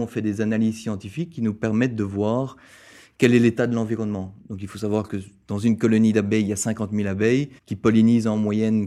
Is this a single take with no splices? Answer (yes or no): no